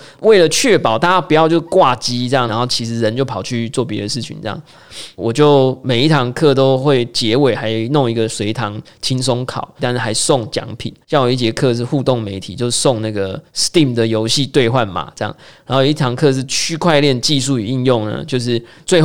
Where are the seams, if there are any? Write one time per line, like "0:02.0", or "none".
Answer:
0:02.5
0:09.8
0:11.0

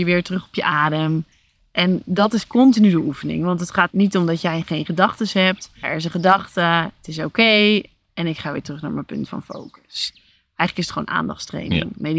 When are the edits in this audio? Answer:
0:03.9
0:05.8

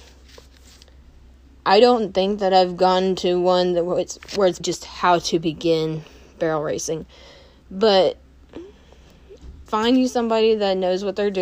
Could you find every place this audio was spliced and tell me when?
0:04.6
0:09.7

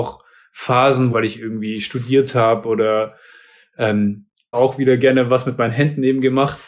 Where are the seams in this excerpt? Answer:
0:01.1
0:04.5

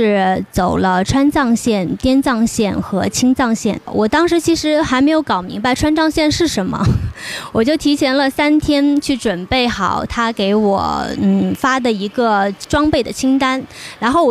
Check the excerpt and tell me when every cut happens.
0:03.9

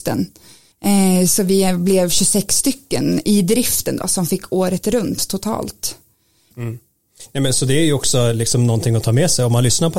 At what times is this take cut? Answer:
0:06.5

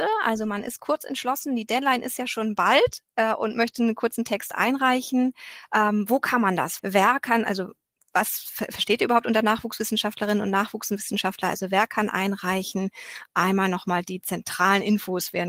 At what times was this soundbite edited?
0:06.8

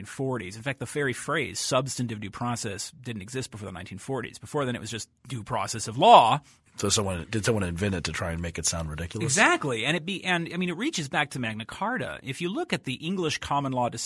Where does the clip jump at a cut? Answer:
none

